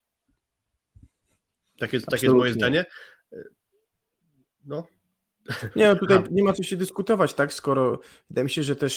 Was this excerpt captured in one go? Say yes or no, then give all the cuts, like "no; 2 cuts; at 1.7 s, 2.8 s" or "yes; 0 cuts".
yes; 0 cuts